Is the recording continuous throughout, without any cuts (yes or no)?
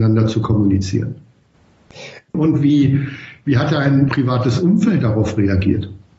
no